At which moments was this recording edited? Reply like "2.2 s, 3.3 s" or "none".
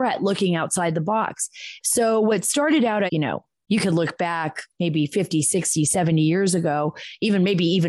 1.8 s, 3.1 s